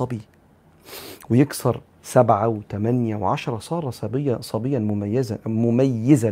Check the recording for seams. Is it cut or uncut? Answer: uncut